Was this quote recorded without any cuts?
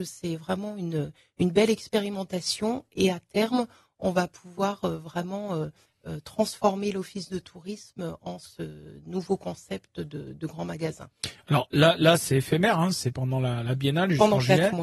yes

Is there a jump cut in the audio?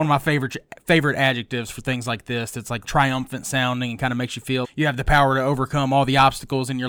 yes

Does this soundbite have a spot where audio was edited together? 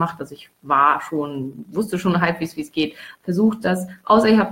yes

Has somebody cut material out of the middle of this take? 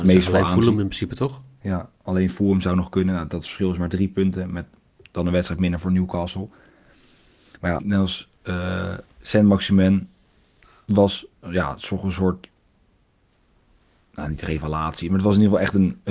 yes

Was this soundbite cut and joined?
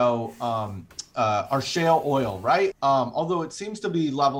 yes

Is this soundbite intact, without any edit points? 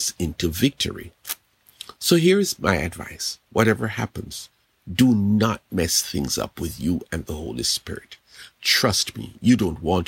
yes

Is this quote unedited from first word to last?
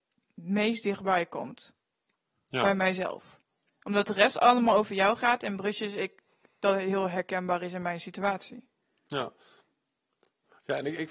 yes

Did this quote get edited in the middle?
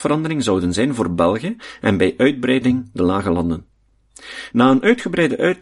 no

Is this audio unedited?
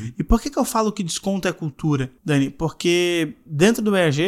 no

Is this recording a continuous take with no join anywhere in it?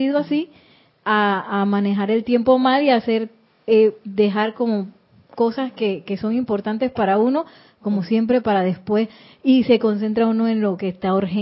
yes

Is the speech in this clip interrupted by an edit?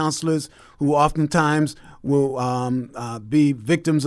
no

